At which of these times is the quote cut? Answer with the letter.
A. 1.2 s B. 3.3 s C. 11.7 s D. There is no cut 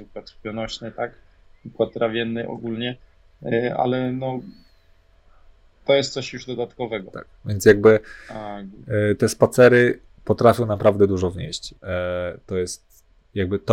C